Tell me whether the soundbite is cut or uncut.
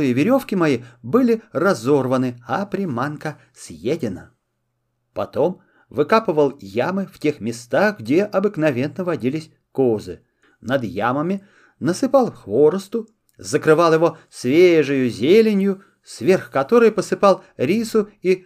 uncut